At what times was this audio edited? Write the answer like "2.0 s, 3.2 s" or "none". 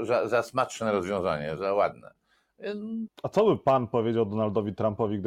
1.6 s, 3.1 s